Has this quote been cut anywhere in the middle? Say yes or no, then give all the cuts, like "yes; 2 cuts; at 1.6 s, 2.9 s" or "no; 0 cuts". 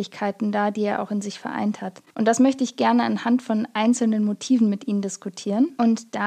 yes; 1 cut; at 2.1 s